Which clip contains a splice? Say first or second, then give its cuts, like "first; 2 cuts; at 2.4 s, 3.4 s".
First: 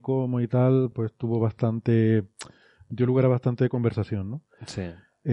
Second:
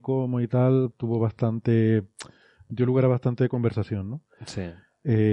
second; 1 cut; at 0.9 s